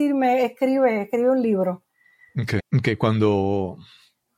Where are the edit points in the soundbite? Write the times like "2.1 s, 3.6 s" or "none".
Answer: 2.6 s